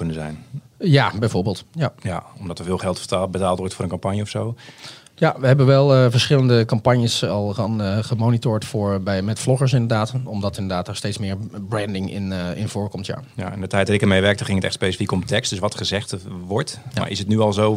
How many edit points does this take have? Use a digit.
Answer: 0